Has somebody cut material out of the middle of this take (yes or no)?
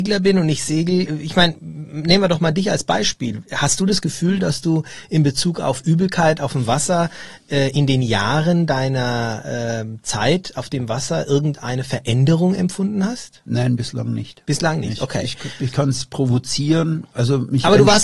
no